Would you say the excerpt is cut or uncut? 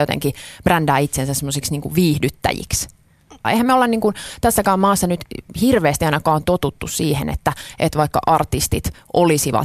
cut